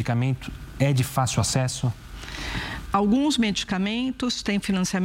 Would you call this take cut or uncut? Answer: cut